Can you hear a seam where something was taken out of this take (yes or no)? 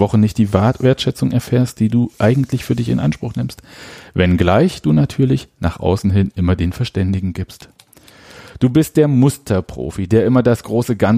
no